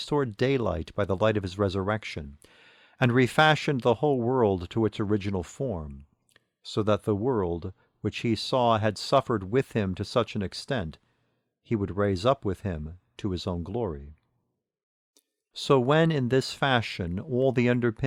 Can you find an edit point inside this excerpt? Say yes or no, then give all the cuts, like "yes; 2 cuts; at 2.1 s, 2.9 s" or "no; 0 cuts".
yes; 1 cut; at 15.5 s